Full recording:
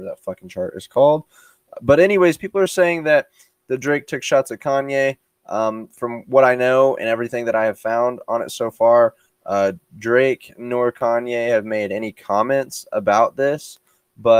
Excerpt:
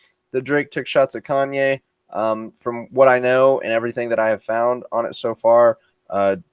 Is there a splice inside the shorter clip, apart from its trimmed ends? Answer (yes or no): no